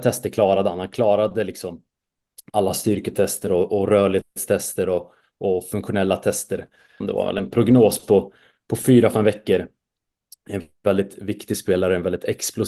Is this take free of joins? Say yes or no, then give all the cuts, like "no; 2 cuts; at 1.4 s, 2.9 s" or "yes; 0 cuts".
no; 1 cut; at 7.0 s